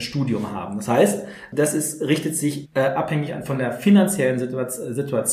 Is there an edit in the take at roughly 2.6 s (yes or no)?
yes